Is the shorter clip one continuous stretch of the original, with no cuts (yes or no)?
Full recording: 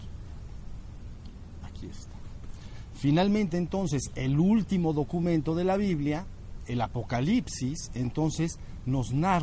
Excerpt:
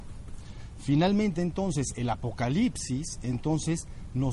no